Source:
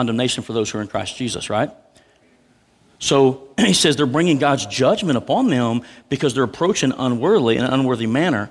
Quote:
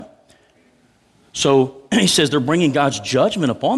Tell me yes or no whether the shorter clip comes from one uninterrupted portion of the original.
yes